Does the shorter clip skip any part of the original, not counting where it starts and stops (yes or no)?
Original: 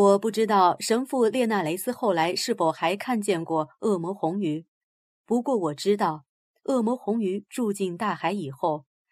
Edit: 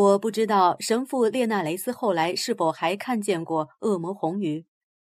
no